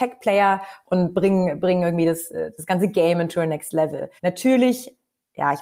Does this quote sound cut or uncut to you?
cut